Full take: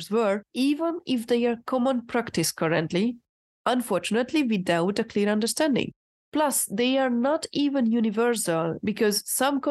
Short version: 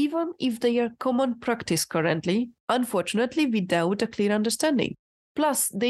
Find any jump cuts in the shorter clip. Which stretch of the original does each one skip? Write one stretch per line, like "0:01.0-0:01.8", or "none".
0:03.2-0:03.5

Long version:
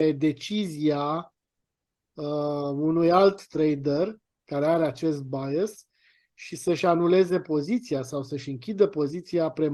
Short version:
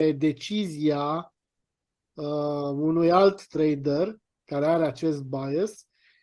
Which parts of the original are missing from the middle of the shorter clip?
none

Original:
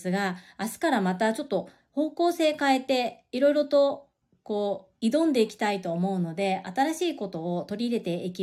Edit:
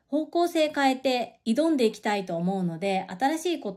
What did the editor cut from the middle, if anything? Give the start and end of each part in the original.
0:03.3-0:05.0

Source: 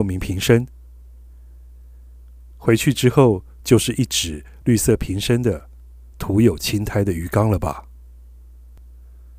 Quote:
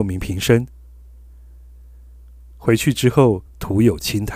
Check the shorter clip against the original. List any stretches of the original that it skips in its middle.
0:03.5-0:06.1

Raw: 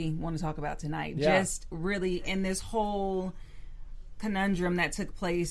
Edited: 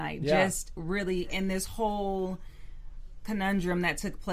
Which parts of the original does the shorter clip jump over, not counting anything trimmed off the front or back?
none

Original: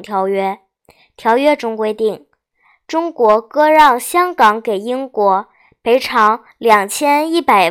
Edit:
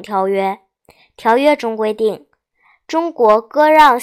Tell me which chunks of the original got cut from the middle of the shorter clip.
none

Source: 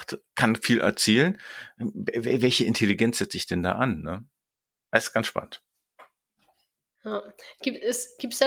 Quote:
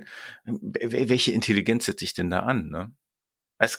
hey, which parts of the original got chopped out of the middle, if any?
none

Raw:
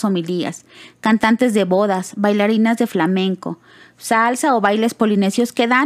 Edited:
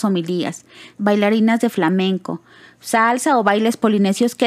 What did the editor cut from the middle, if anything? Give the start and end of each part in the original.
0:01.0-0:02.2

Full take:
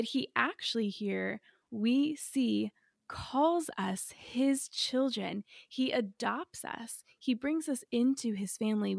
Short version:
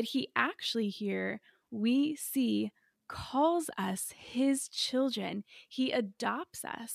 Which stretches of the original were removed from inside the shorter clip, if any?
none

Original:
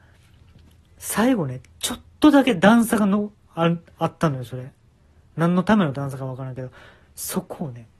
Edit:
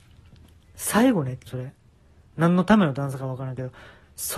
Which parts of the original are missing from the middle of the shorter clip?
0:01.7-0:04.5

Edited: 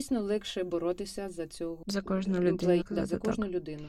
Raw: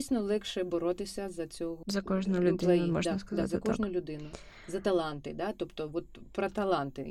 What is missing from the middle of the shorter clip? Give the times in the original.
0:02.8-0:03.2

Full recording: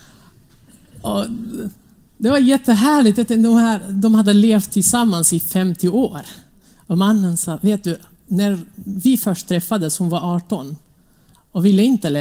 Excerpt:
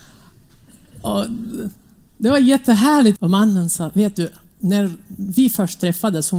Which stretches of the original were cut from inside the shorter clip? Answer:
0:03.2-0:06.8

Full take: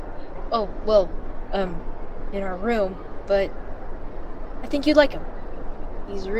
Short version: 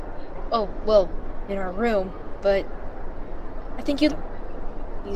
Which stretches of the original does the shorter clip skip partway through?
0:01.5-0:02.3
0:04.9-0:05.1

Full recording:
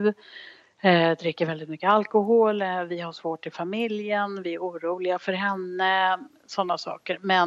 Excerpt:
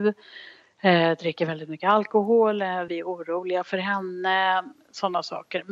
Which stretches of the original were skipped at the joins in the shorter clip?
0:02.9-0:04.4

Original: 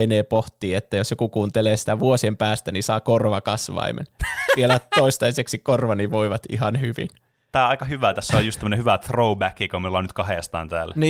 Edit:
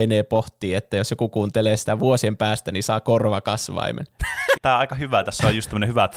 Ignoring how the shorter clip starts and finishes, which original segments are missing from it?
0:04.6-0:07.5

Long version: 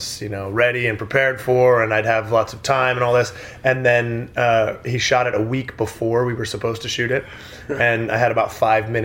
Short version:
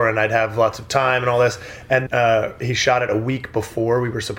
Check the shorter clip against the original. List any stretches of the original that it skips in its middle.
0:03.8-0:04.3

